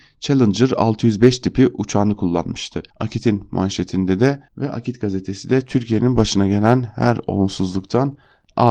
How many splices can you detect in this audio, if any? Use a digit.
2